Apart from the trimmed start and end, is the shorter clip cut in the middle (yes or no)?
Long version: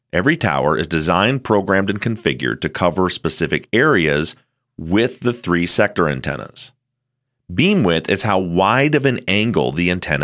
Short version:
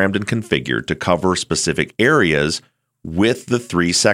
no